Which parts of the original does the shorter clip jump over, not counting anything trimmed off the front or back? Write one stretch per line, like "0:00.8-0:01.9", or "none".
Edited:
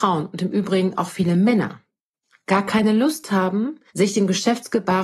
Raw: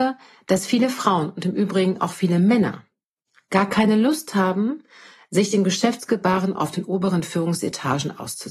0:04.9-0:05.2